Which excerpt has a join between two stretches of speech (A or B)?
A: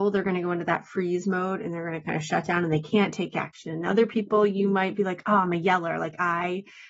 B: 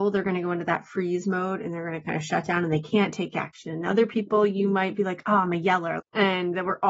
B